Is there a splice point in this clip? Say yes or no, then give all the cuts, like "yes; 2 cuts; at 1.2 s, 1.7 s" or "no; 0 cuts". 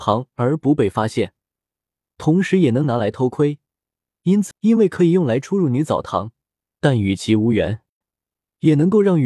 yes; 2 cuts; at 4.5 s, 8.0 s